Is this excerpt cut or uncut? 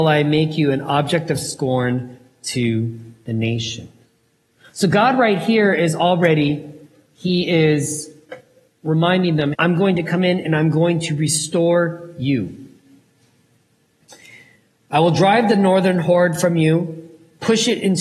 cut